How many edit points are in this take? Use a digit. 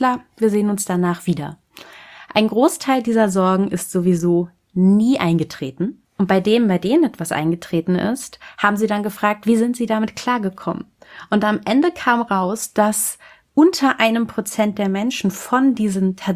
0